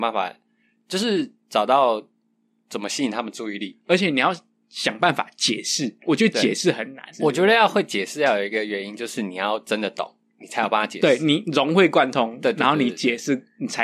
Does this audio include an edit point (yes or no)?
yes